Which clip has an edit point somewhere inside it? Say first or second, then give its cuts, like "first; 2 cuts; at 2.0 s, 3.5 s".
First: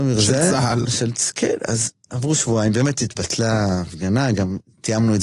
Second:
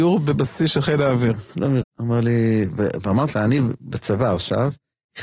second; 2 cuts; at 1.8 s, 3.3 s